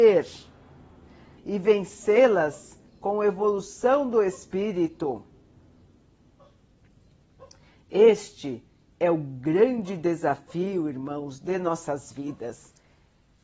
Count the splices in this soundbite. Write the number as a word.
one